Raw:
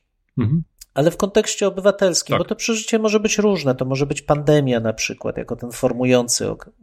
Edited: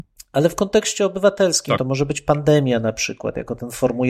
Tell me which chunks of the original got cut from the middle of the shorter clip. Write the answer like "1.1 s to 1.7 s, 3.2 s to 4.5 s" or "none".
2.4 s to 3.8 s

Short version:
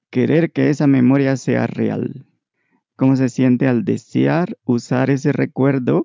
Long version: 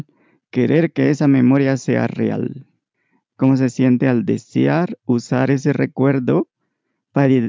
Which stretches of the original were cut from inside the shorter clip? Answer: none

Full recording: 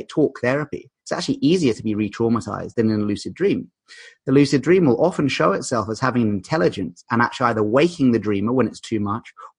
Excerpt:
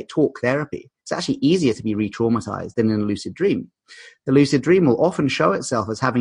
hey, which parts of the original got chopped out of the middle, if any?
none

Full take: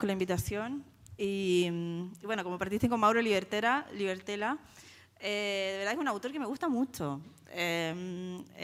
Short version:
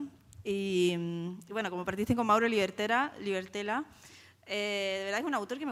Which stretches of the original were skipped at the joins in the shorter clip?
none

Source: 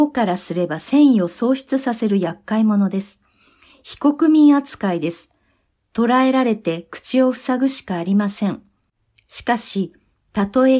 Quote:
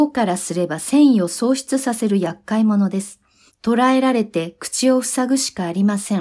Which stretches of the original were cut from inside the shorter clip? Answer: 3.5 s to 5.8 s

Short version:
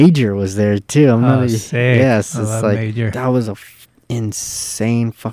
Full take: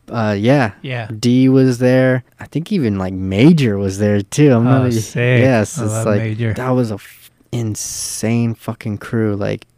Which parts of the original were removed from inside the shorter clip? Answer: none

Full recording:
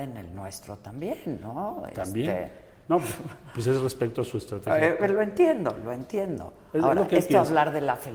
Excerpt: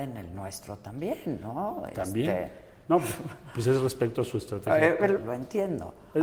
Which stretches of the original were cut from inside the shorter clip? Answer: 5.2 s to 5.8 s

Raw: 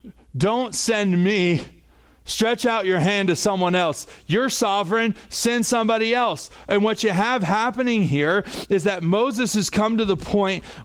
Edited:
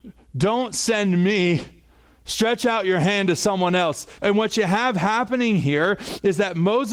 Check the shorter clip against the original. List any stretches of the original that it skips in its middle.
4.2 s to 6.6 s

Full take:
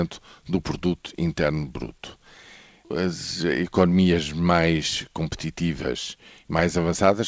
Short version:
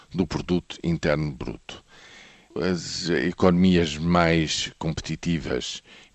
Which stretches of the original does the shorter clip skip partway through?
none

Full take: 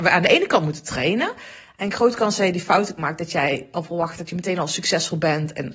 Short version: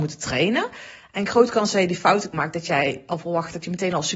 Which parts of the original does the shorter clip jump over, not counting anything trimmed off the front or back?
none

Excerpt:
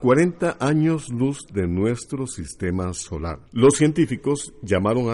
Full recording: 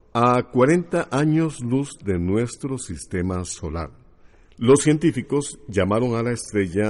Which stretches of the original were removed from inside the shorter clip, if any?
4.0 s to 4.5 s

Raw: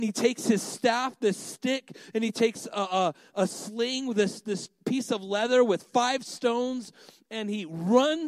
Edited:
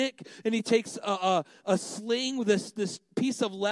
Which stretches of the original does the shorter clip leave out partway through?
none

